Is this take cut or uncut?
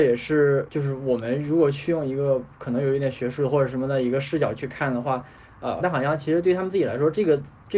cut